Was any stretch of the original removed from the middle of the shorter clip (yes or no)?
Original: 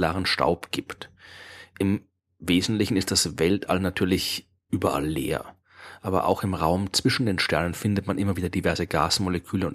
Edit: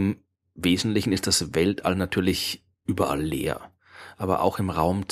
no